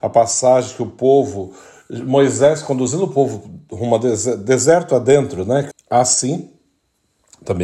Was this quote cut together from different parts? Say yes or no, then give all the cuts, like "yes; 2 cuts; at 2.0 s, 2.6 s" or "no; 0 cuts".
yes; 1 cut; at 5.7 s